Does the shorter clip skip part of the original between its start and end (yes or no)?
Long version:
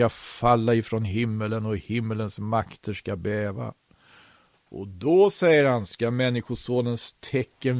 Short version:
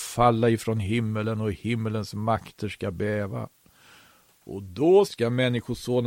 yes